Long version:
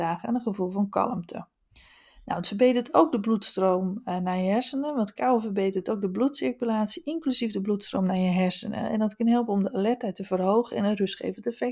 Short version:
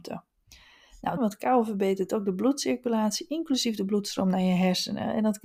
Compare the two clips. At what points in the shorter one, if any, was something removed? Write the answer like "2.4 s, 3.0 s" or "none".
1.2 s